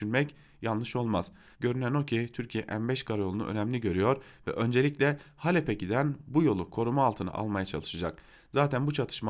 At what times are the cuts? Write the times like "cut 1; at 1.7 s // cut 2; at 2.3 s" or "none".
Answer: cut 1; at 1.5 s